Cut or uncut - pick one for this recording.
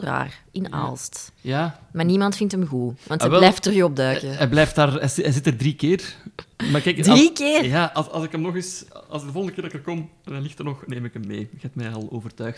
uncut